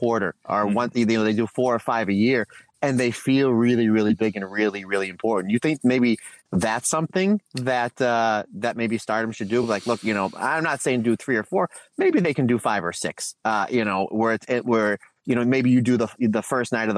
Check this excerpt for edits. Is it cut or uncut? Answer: uncut